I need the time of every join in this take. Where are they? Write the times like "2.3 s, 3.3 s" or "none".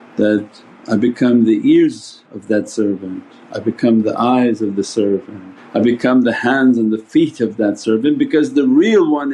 5.6 s